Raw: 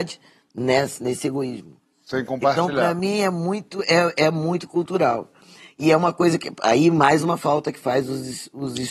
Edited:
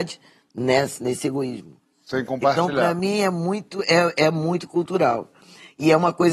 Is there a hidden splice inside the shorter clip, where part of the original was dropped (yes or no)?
no